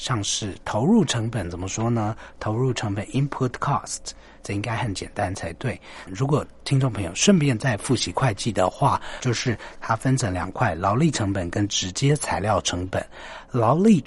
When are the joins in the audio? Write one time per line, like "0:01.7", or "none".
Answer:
0:06.1
0:09.2